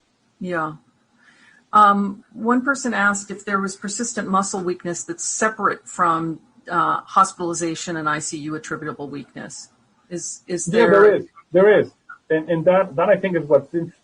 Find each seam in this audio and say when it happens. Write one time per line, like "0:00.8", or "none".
none